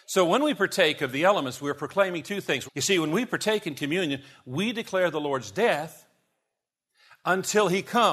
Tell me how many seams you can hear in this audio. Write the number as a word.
one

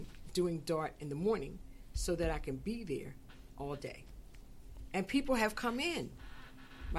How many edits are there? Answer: zero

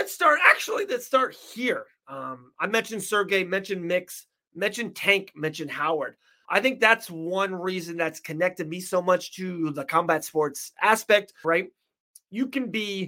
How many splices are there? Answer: two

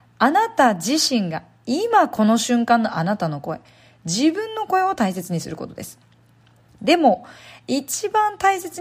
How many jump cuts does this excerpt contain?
one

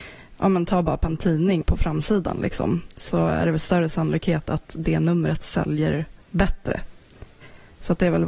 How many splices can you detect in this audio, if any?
two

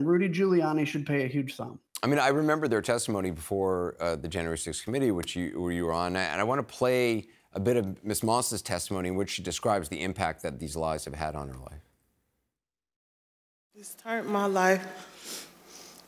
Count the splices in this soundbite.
zero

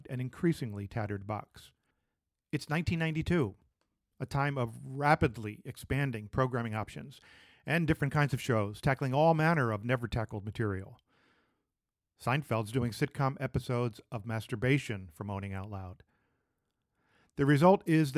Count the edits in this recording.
zero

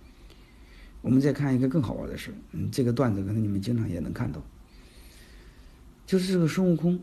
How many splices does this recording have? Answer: zero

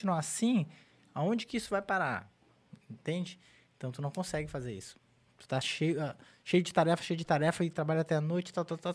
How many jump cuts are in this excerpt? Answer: zero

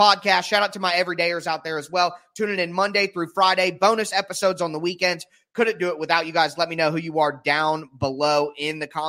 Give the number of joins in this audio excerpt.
zero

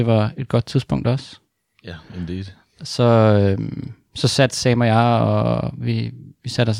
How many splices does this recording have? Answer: zero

